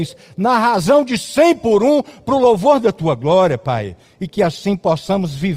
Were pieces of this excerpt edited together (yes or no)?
no